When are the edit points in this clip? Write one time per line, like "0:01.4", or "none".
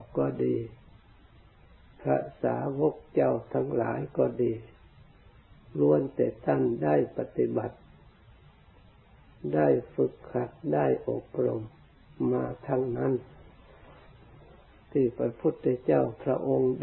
none